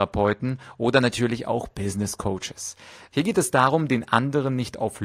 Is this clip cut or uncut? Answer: cut